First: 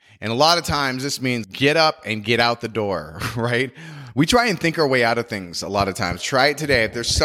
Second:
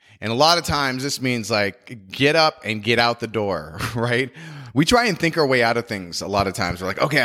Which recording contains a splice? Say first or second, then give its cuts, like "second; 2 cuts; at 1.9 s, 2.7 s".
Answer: first; 2 cuts; at 1.4 s, 6.2 s